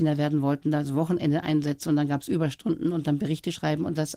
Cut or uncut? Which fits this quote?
uncut